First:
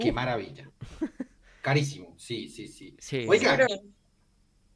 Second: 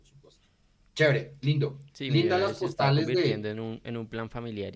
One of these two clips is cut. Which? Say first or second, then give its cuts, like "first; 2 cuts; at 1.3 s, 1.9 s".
first; 1 cut; at 3.7 s